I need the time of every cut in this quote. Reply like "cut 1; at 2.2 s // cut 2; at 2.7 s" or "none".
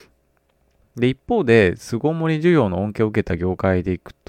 none